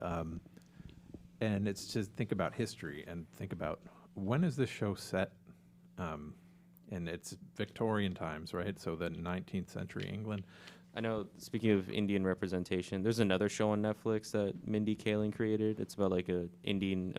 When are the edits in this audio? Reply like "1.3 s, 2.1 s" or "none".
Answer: 10.8 s